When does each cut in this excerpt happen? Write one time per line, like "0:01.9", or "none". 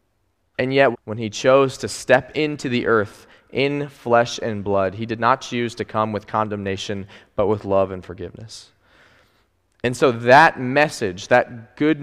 0:00.9